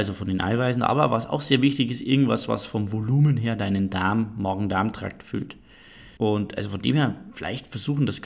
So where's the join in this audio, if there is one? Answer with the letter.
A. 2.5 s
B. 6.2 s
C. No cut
B